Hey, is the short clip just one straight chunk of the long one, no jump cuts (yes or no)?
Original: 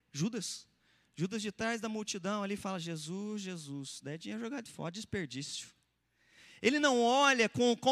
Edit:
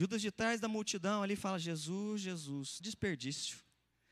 no